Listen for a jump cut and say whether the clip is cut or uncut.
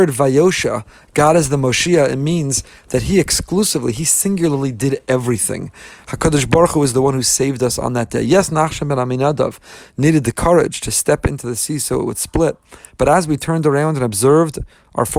uncut